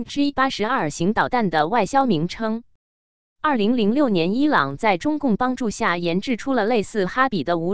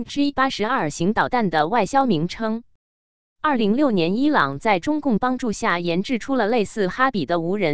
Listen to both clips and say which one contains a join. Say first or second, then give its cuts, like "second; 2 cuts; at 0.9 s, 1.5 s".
second; 1 cut; at 3.6 s